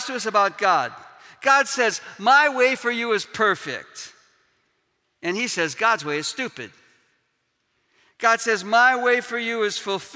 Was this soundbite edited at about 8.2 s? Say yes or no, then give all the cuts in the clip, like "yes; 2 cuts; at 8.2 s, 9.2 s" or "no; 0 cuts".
no; 0 cuts